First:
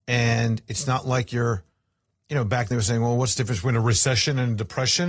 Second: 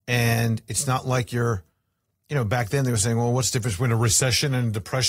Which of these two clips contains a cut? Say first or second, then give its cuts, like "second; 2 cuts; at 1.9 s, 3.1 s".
first; 1 cut; at 2.7 s